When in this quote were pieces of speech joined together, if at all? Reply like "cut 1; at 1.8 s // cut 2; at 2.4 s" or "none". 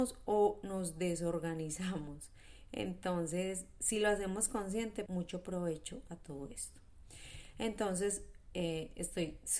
cut 1; at 5.1 s // cut 2; at 7.5 s